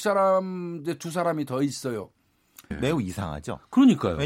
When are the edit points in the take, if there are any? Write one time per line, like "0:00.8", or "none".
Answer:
0:02.7